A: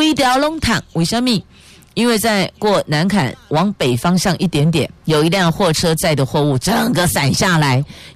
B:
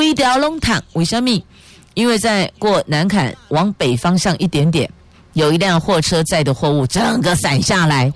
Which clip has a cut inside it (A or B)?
A